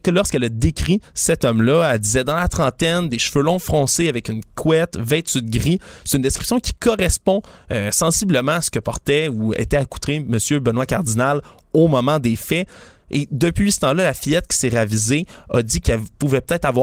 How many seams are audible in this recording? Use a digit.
0